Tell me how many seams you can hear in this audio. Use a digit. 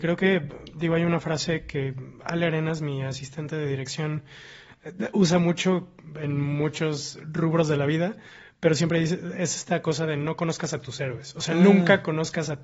0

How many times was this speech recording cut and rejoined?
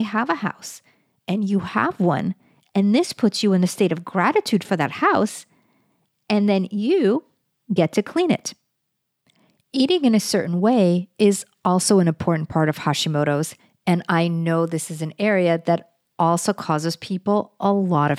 0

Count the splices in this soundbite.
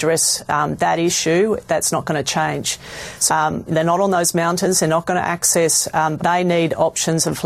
2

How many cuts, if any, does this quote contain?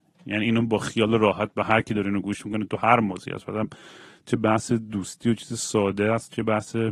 0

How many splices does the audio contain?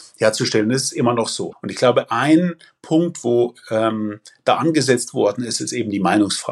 1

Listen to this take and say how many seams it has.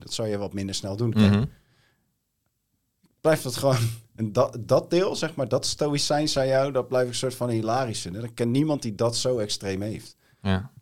1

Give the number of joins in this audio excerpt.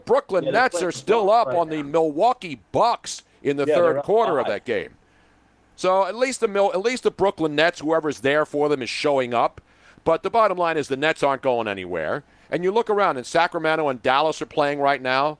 0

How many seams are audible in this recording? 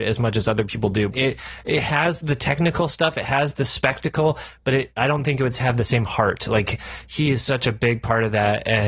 1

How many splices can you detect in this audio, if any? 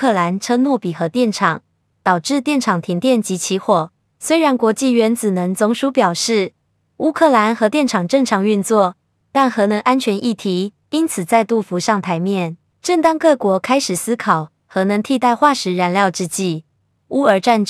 2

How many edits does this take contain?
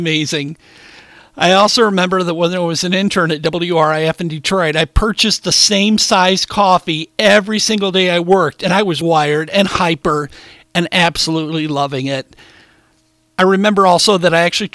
1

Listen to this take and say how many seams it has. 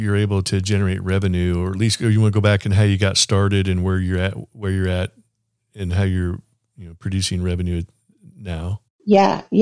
0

